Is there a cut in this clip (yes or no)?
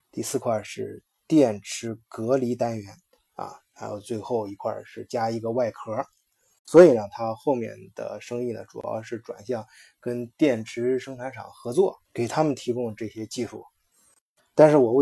yes